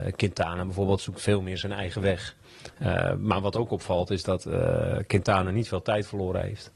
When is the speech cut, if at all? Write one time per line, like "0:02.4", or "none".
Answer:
none